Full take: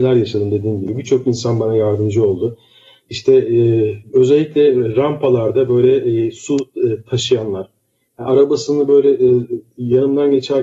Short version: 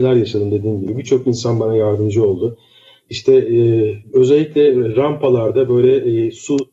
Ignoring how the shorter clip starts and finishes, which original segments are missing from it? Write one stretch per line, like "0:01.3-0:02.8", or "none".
none